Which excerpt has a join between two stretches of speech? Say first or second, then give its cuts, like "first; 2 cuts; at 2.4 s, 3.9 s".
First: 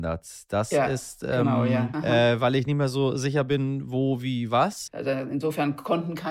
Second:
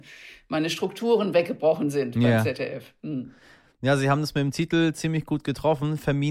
first; 2 cuts; at 1.9 s, 4.9 s